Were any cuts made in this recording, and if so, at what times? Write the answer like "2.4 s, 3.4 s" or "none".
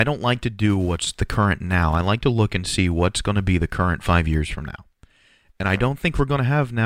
none